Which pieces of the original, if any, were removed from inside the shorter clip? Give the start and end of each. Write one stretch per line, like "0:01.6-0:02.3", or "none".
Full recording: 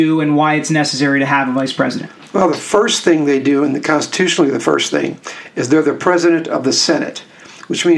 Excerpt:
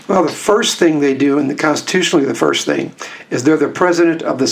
none